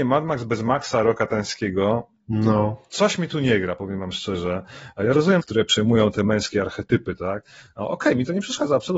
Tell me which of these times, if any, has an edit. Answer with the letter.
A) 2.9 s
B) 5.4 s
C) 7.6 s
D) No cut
B